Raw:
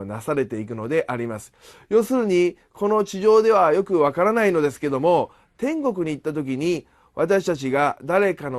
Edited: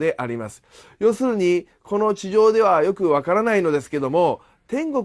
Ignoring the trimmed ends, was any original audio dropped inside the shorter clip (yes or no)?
no